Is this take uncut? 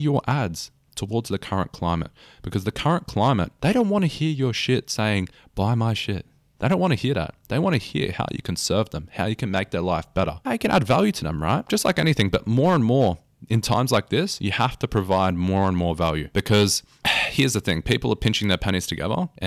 yes; 0 cuts

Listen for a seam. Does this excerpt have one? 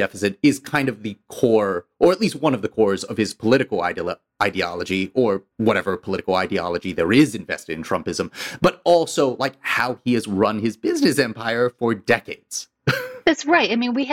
yes; 1 cut; at 5.5 s

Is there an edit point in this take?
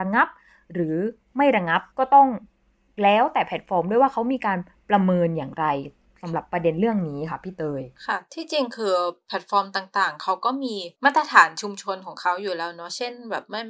yes; 2 cuts; at 1.9 s, 10.9 s

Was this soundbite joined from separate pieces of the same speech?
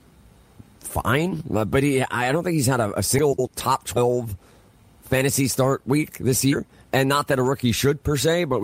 no; 0 cuts

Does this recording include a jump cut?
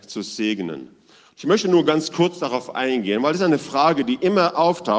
no; 0 cuts

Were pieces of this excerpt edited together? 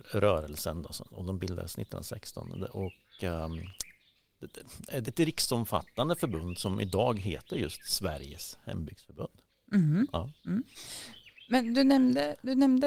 yes; 1 cut; at 5.0 s

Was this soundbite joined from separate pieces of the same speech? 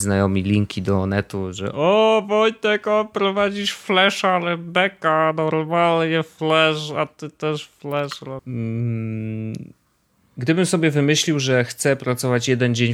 yes; 1 cut; at 8.4 s

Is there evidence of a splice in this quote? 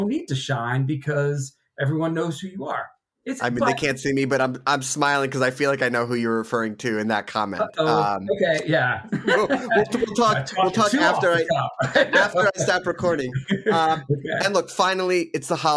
no; 0 cuts

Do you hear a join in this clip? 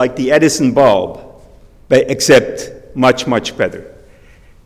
no; 0 cuts

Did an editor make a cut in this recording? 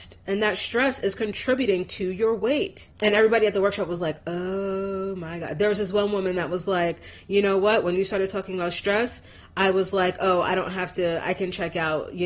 yes; 1 cut; at 2.9 s

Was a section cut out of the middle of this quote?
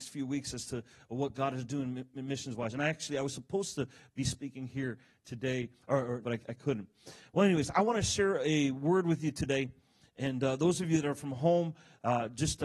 yes; 1 cut; at 6.2 s

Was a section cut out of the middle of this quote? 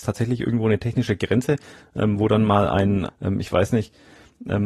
yes; 1 cut; at 3.1 s

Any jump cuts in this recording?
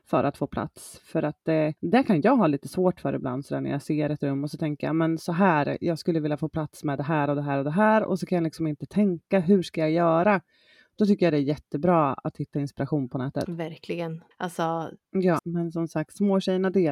yes; 3 cuts; at 1.8 s, 14.3 s, 15.4 s

